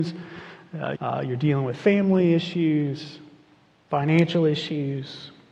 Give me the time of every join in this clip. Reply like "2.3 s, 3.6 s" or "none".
0.9 s